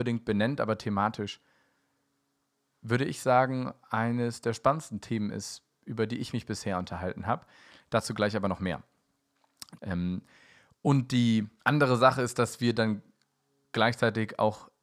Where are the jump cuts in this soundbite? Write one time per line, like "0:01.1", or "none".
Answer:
0:09.8
0:11.6